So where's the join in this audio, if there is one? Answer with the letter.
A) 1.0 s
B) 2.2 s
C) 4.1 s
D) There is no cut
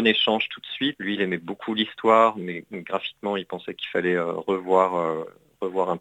A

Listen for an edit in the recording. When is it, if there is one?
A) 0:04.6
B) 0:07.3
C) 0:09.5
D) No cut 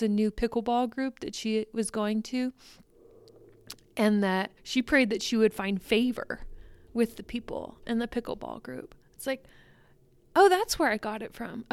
A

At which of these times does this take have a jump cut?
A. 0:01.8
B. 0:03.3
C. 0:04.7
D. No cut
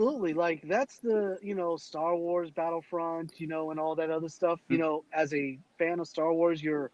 C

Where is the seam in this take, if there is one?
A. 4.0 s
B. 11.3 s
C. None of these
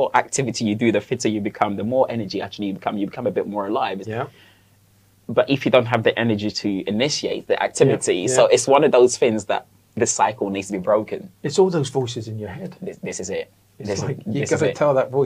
A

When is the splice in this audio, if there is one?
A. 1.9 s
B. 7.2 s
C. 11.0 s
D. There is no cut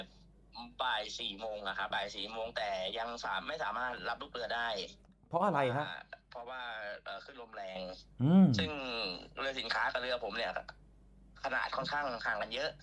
A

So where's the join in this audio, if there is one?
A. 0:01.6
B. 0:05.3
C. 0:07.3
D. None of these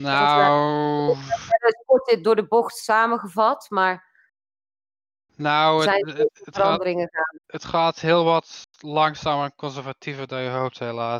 C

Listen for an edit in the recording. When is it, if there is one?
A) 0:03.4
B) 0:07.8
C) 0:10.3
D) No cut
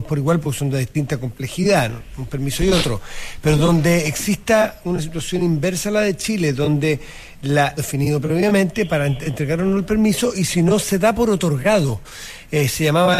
B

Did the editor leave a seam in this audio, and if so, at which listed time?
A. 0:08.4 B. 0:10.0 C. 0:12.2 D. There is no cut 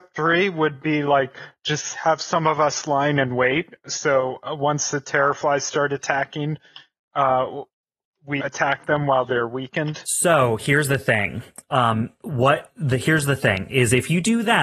A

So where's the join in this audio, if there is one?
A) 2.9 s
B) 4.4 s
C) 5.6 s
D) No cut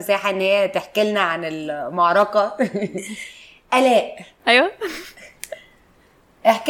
B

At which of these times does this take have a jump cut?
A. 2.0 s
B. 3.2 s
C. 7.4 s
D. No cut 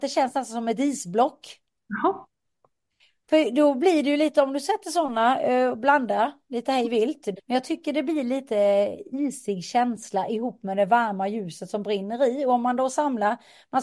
C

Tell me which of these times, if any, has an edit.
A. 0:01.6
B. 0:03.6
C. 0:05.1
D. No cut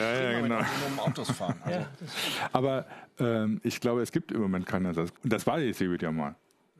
C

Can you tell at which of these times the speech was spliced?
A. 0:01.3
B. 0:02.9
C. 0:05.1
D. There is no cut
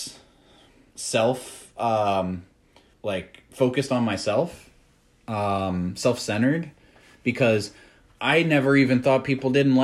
B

